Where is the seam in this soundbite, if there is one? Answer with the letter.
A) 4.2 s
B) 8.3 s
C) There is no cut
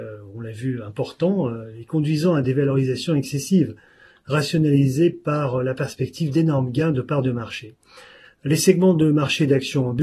C